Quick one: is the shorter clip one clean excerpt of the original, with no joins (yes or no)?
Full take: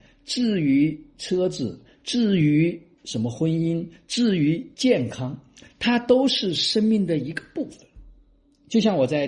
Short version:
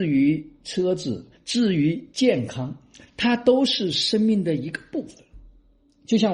no